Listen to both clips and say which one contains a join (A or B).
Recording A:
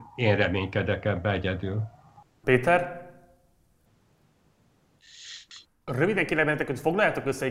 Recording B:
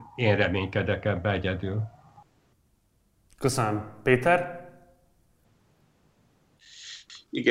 A